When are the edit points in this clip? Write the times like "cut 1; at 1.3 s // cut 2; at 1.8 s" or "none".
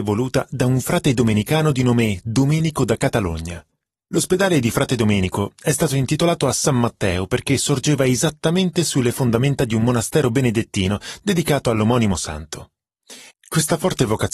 cut 1; at 13.3 s